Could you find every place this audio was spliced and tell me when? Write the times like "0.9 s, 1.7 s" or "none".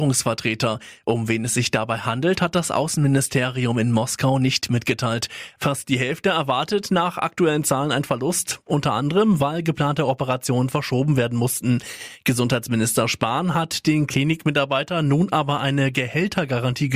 5.6 s